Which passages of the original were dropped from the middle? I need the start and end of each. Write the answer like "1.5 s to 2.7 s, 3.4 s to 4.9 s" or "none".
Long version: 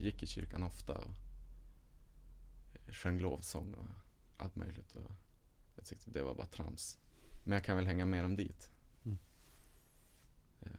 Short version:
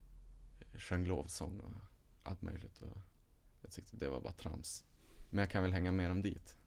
none